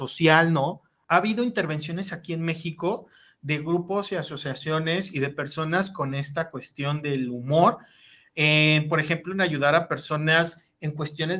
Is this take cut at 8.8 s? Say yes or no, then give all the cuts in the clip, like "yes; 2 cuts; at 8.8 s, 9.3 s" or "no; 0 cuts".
no; 1 cut; at 1.0 s